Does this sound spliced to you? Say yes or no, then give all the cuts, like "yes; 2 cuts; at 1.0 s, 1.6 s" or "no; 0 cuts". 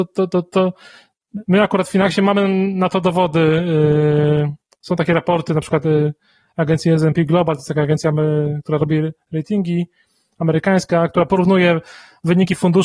no; 0 cuts